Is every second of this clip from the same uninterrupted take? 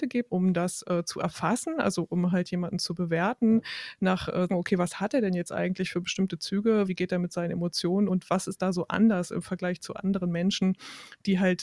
no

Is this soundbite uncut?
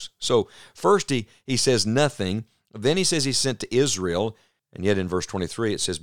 no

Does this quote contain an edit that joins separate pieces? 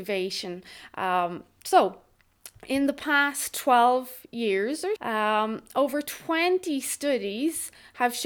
yes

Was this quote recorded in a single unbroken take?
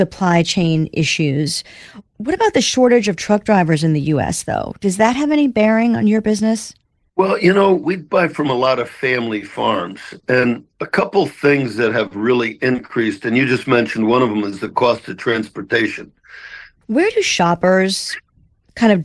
no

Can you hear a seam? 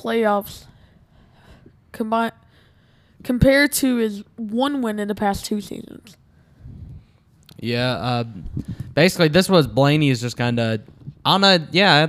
no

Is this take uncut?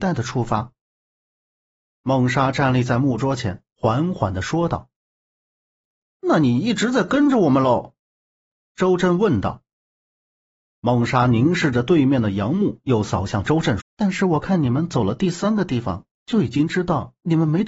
no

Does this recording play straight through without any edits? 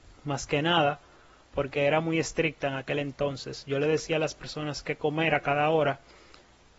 yes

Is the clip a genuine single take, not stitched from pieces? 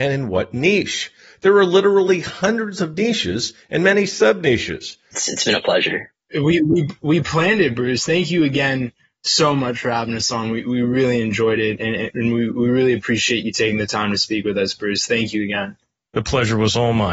no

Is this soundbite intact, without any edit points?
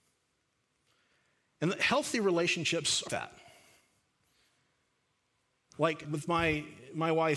no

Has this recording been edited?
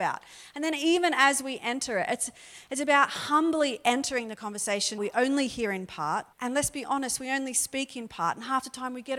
yes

